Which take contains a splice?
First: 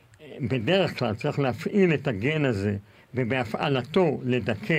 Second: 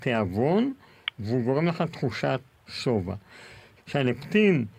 second; 1 cut; at 3.8 s

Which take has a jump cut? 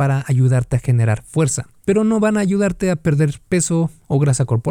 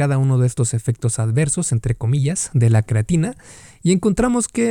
first; 1 cut; at 1.8 s

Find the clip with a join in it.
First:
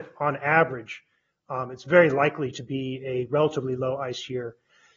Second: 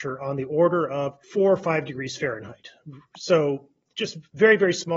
second; 1 cut; at 1.2 s

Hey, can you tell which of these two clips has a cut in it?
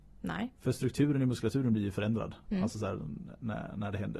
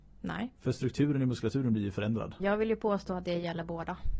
second; 1 cut; at 2.4 s

